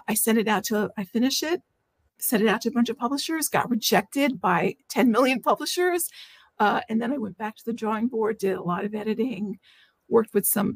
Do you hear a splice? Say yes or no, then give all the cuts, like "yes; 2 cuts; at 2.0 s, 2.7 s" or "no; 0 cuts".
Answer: no; 0 cuts